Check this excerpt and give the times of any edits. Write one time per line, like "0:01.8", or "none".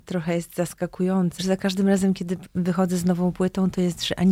0:01.4